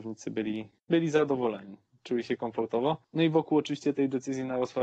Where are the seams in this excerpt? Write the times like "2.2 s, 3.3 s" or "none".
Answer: none